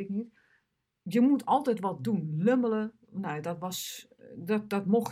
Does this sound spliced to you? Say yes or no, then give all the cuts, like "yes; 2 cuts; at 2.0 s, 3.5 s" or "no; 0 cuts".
no; 0 cuts